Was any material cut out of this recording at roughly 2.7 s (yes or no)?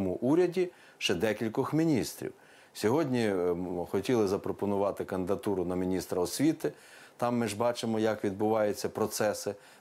no